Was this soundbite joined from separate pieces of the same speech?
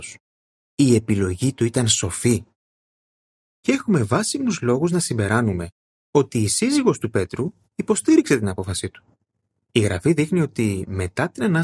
no; 0 cuts

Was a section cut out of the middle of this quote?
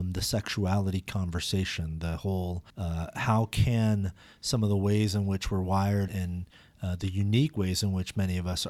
yes; 2 cuts; at 2.7 s, 6.1 s

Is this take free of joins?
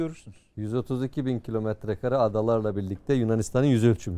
yes; 0 cuts

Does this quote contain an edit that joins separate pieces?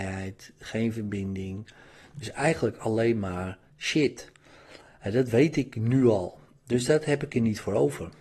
no; 0 cuts

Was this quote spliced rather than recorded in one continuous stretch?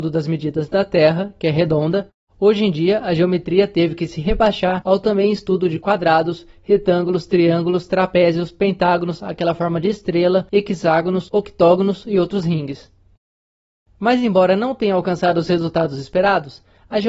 no; 0 cuts

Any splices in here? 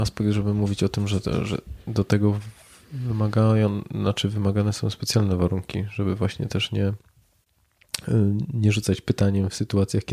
no; 0 cuts

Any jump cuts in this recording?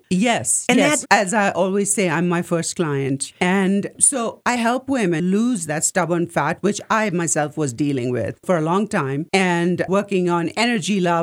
yes; 1 cut; at 1.0 s

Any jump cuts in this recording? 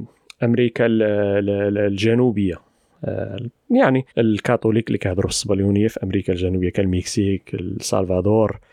yes; 1 cut; at 4.1 s

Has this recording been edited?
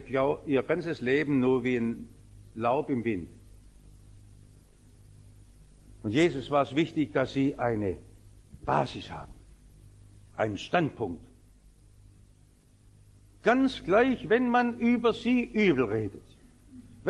no; 0 cuts

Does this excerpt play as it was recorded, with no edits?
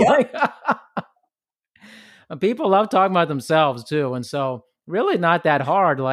yes; 0 cuts

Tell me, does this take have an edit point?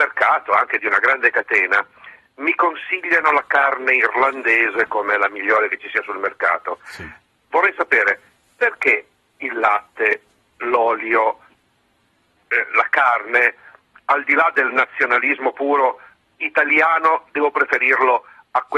no; 0 cuts

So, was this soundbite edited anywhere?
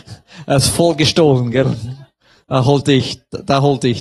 no; 0 cuts

